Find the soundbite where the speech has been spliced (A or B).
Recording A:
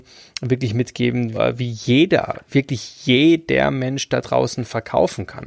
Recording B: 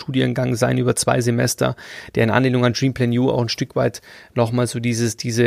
A